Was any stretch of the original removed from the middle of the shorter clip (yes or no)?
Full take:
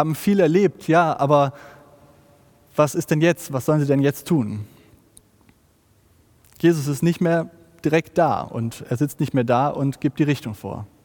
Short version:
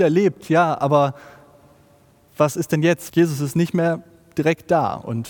yes